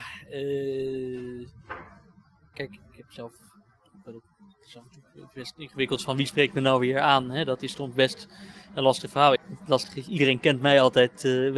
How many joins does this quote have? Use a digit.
2